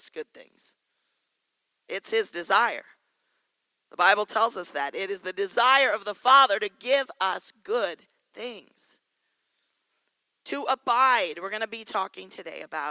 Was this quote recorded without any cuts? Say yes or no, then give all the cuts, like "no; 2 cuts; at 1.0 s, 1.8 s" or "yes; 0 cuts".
yes; 0 cuts